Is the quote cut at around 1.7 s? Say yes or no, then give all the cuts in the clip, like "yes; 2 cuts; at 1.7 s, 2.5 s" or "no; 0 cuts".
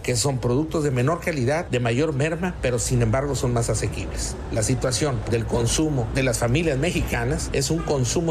no; 1 cut; at 5.3 s